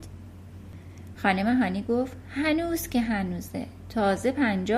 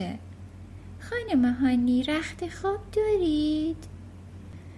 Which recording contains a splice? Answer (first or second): first